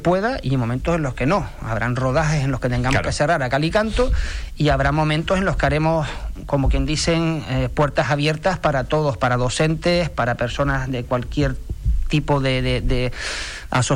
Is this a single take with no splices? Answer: yes; 0 cuts

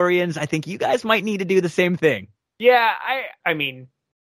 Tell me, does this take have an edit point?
yes; 1 cut; at 3.4 s

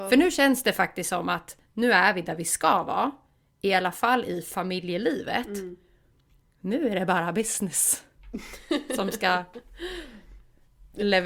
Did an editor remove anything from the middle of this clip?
no; 0 cuts

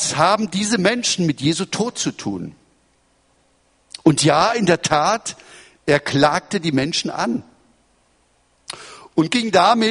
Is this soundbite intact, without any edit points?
yes; 0 cuts

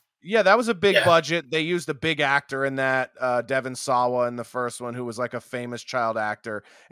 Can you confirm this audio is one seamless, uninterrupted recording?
yes; 0 cuts

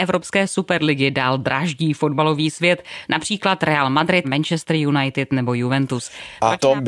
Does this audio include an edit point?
yes; 2 cuts; at 3.0 s, 4.2 s

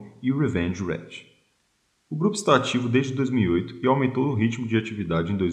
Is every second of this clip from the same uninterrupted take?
yes; 0 cuts

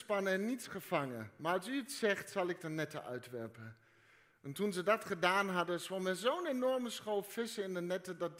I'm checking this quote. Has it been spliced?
no; 0 cuts

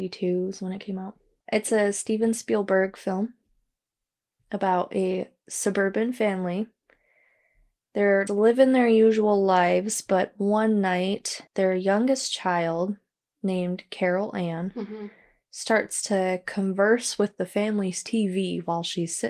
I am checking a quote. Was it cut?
yes; 3 cuts; at 1.4 s, 8.3 s, 11.5 s

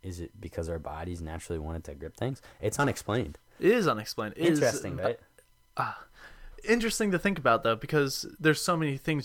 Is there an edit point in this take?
yes; 1 cut; at 5.0 s

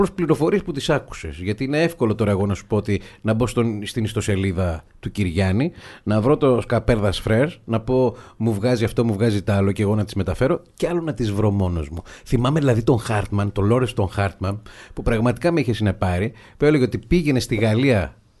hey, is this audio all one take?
yes; 0 cuts

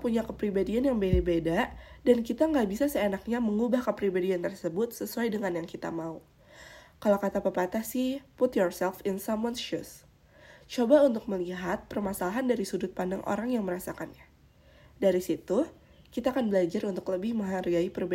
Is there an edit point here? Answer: no; 0 cuts

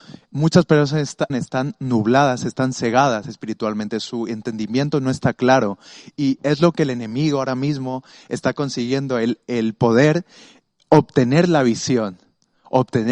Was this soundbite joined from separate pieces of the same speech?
yes; 1 cut; at 1.3 s

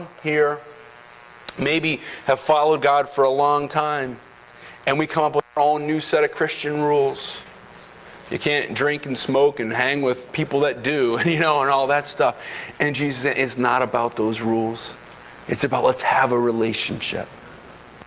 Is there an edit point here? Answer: no; 0 cuts

